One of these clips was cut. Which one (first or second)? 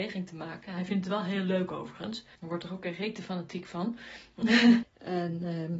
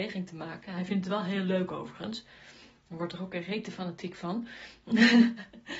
first